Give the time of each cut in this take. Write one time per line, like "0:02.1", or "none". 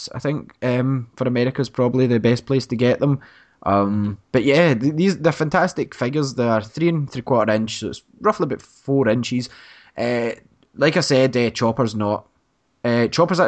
none